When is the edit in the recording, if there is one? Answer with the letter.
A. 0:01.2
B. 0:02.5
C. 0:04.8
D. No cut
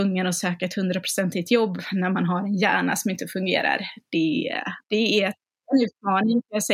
C